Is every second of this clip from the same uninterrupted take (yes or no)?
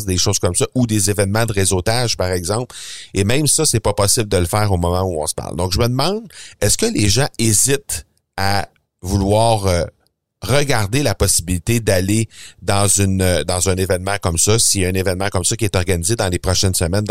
yes